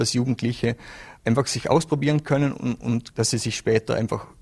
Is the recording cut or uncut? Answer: cut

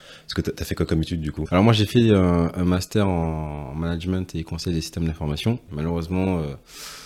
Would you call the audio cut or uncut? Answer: cut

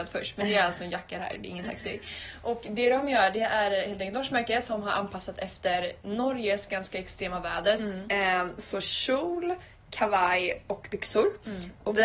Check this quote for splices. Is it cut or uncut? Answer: cut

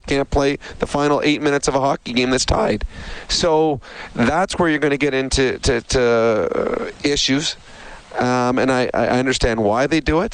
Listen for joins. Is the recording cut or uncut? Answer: uncut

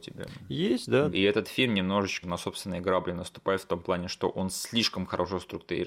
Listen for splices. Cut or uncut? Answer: cut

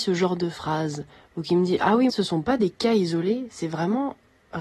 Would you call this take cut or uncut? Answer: cut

